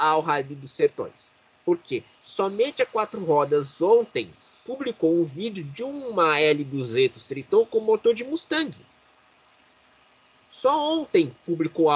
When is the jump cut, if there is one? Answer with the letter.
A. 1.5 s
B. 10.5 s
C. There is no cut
B